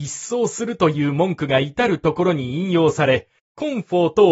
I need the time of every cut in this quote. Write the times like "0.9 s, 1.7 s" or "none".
3.4 s